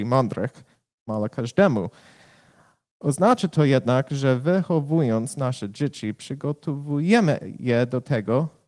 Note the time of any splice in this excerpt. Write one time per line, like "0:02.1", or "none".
0:01.1